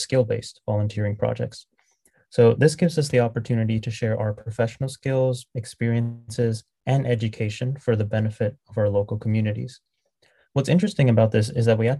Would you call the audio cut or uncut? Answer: uncut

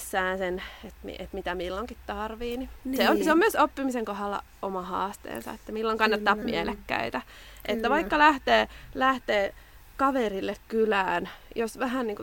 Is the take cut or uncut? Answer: cut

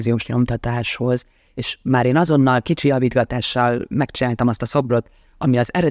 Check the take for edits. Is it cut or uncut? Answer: uncut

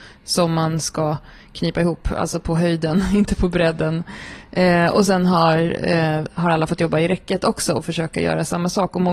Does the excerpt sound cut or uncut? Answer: uncut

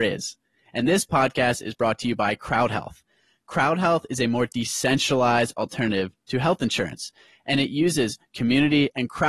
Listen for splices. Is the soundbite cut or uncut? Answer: uncut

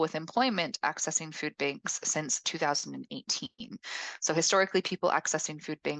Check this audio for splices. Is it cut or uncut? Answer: uncut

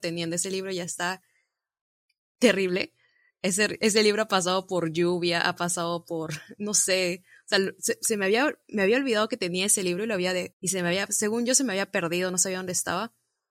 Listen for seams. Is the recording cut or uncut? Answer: cut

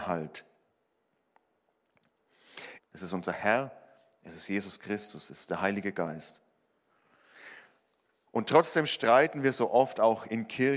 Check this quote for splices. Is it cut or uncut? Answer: cut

